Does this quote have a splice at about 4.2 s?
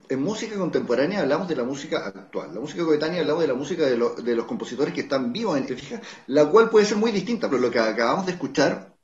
no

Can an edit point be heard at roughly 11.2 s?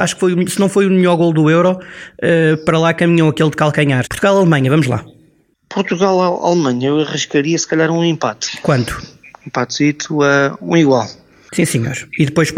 no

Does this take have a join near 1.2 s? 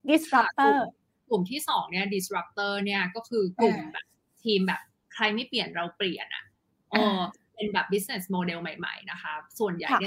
no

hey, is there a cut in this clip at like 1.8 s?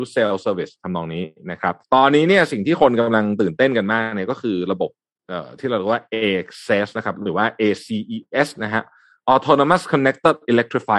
yes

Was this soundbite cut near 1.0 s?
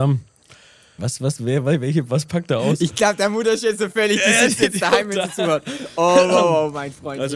yes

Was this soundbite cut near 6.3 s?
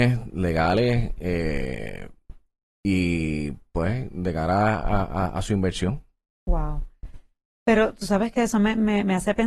no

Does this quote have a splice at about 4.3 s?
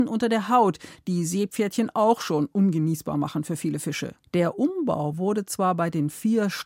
yes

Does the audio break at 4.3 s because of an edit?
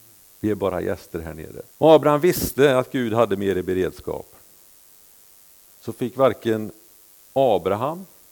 no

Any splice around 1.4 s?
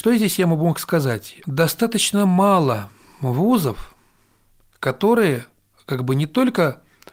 yes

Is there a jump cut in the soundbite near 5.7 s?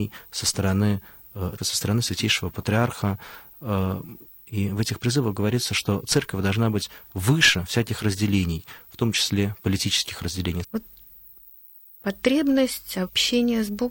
no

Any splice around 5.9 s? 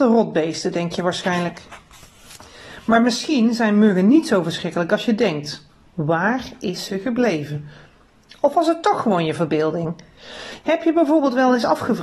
yes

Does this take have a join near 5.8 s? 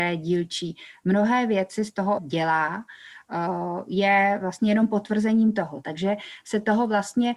yes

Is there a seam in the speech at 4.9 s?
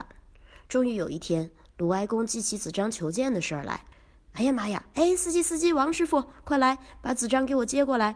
yes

